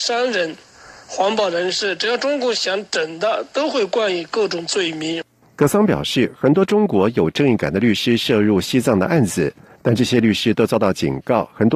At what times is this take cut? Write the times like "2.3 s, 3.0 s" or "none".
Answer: none